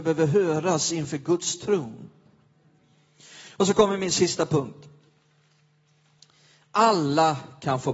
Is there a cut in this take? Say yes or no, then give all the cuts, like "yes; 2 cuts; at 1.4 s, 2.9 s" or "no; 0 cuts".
no; 0 cuts